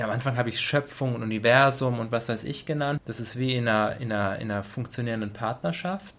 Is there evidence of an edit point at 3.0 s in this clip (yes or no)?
yes